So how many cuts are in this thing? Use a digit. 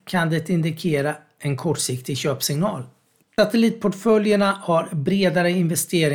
1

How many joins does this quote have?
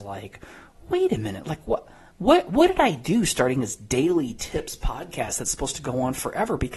0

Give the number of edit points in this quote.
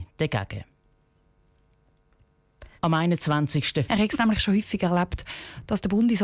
2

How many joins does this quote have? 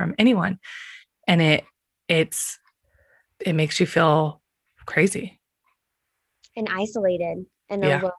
0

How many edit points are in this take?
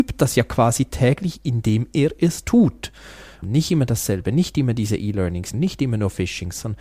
2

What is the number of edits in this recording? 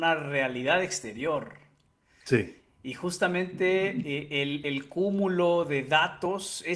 0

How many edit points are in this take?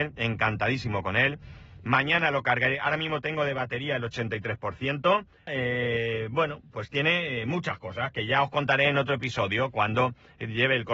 1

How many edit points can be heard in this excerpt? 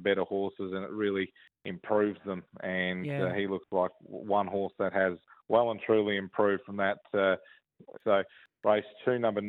1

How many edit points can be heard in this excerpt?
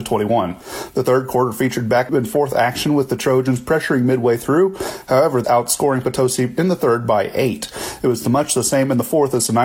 1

